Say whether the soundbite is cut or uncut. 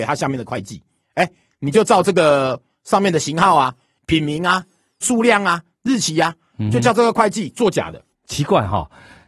cut